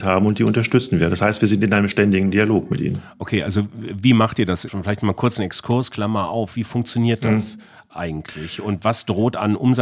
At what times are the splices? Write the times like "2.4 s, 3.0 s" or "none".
4.7 s

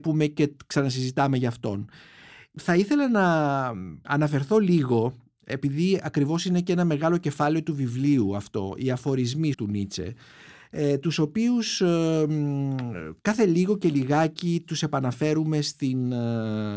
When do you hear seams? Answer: 9.5 s

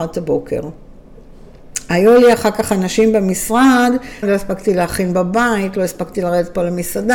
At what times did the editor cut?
4.2 s

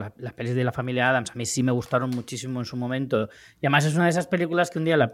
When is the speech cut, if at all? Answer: none

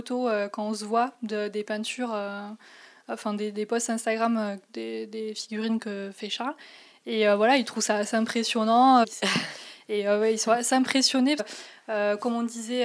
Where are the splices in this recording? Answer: 9.0 s, 11.4 s

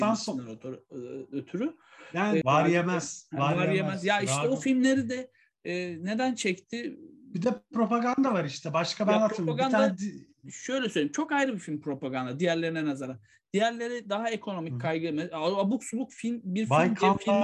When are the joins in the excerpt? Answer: 2.4 s

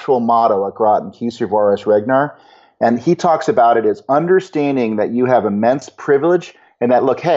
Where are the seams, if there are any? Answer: none

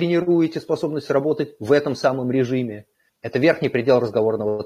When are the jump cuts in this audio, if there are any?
3.1 s

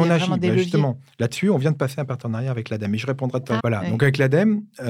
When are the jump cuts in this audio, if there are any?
3.6 s

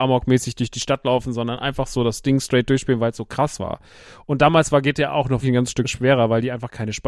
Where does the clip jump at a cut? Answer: 3.1 s, 5.4 s

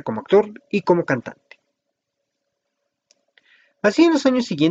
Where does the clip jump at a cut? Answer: none

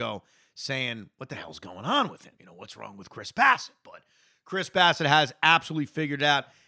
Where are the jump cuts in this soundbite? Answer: none

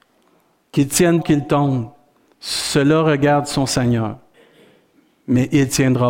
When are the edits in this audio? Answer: 1.2 s

